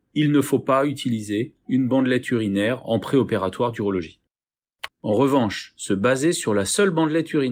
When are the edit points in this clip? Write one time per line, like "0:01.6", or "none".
0:04.9